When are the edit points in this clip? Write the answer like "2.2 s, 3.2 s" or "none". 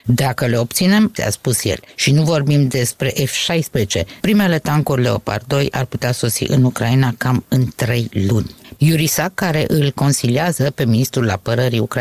1.2 s, 4.2 s, 8.8 s

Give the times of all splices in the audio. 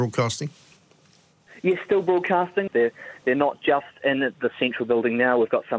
2.7 s

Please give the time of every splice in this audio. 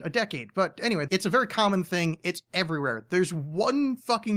1.1 s

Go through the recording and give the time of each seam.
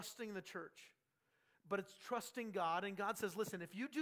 none

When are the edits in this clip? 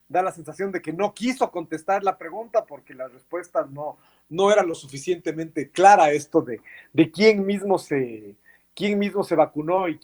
none

